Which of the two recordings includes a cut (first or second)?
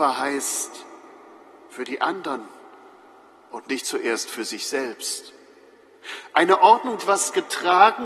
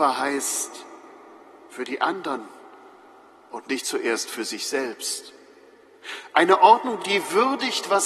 first